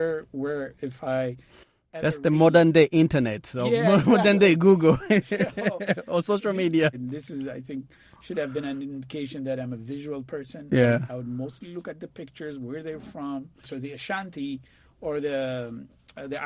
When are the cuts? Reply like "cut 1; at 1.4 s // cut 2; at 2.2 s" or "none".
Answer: cut 1; at 6.9 s // cut 2; at 13.6 s